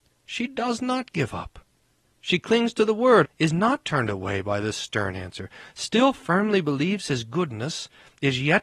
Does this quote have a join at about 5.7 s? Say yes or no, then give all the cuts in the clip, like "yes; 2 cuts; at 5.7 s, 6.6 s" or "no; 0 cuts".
no; 1 cut; at 3.2 s